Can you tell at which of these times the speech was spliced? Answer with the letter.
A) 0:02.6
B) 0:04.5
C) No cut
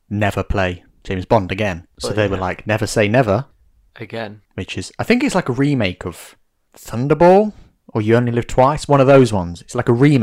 B